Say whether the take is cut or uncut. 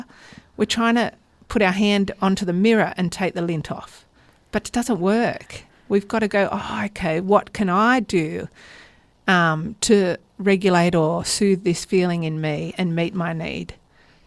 uncut